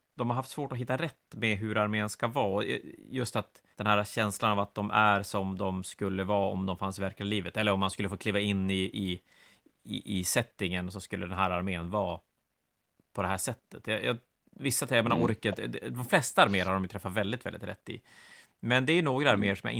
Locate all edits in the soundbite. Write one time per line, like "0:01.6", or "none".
0:03.7